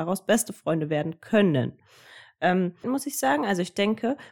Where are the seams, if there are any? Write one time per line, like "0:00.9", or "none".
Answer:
0:02.8